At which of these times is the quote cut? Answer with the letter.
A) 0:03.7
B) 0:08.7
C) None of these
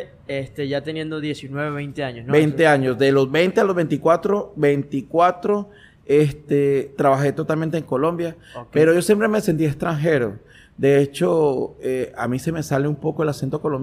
C